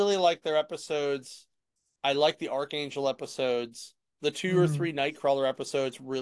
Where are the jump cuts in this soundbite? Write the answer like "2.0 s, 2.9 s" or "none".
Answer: 4.1 s